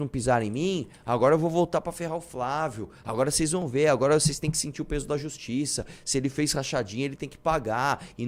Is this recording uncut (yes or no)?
yes